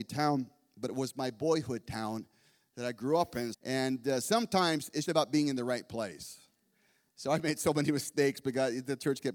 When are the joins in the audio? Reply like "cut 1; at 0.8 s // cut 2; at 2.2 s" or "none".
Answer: cut 1; at 3.5 s // cut 2; at 5.0 s